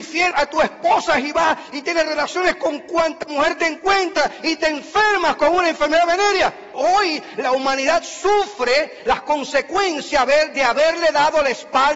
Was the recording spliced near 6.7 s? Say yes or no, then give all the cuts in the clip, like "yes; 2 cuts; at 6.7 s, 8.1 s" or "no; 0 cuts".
yes; 1 cut; at 6.7 s